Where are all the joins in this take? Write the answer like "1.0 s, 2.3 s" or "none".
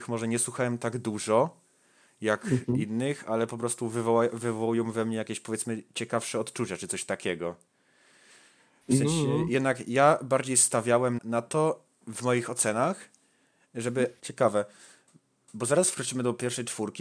11.2 s, 14.2 s